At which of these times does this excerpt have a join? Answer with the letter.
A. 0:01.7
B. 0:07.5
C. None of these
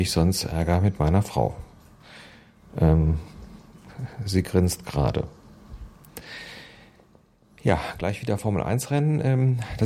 C